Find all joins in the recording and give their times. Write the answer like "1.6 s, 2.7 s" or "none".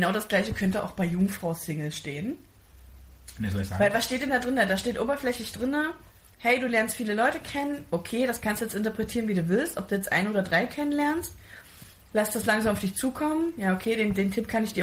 none